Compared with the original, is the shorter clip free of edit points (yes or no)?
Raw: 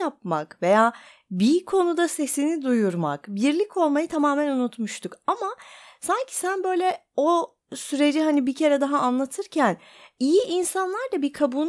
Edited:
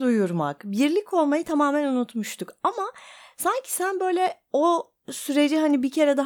yes